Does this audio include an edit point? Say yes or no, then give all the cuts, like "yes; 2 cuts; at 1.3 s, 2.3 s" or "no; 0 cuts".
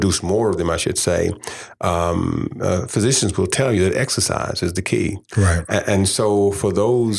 no; 0 cuts